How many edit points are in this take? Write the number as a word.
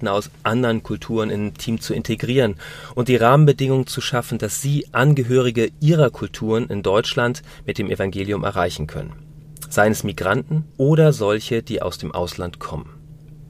one